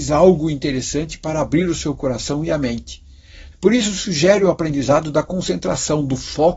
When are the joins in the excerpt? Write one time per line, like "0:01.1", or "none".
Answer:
0:03.5